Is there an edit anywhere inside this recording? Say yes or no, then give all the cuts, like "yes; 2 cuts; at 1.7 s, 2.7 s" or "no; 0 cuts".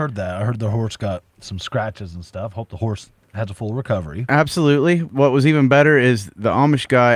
no; 0 cuts